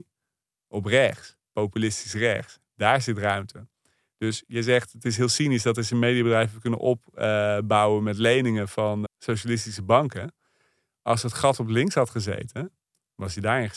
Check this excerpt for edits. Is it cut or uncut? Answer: cut